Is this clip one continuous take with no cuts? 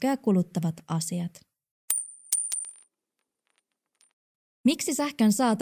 yes; 0 cuts

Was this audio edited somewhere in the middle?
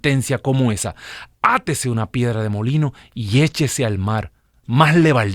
no; 0 cuts

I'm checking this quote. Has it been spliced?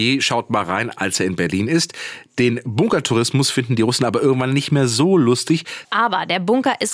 yes; 1 cut; at 5.8 s

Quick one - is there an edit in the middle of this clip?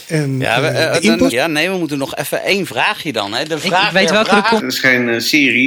yes; 2 cuts; at 1.3 s, 4.6 s

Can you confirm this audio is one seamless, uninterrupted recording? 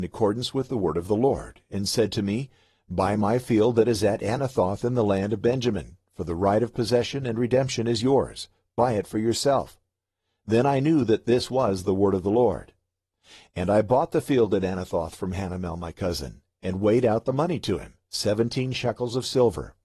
yes; 0 cuts

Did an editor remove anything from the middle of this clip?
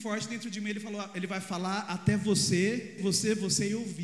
yes; 1 cut; at 3.0 s

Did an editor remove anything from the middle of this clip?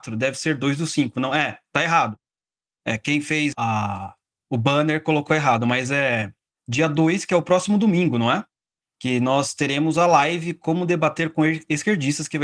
yes; 1 cut; at 3.5 s

